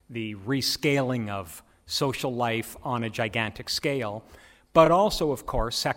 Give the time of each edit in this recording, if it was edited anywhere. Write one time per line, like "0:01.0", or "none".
none